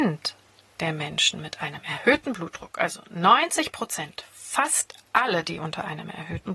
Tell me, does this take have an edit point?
no; 0 cuts

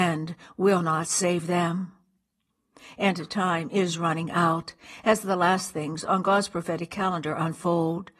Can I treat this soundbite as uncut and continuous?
no; 1 cut; at 3.0 s

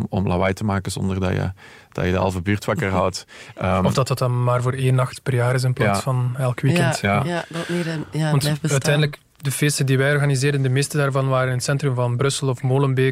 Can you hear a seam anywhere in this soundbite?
no; 0 cuts

